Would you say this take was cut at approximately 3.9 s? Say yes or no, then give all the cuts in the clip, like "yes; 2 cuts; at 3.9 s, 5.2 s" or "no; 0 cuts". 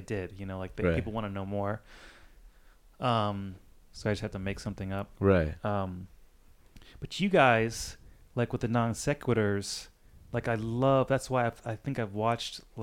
yes; 1 cut; at 3.9 s